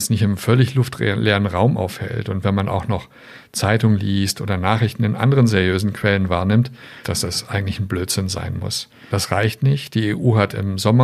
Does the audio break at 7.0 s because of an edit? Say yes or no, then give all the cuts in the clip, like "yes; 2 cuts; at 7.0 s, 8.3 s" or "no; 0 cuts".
yes; 2 cuts; at 7.0 s, 9.1 s